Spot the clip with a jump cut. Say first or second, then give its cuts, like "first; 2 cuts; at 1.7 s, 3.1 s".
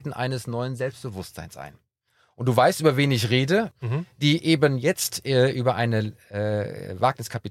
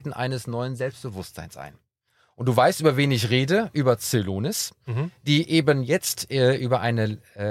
first; 1 cut; at 3.7 s